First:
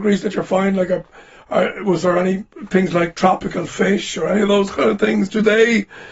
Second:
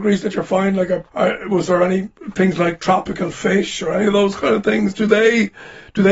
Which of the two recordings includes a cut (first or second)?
second